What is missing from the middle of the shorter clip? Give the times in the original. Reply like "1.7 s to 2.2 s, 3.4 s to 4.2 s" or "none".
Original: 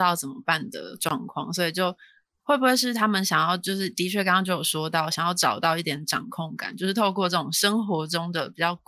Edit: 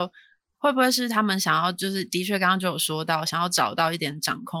none